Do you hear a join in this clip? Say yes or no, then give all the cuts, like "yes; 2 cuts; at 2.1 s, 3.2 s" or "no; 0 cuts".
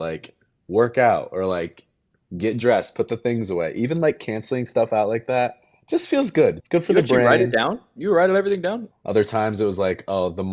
yes; 2 cuts; at 6.6 s, 8.9 s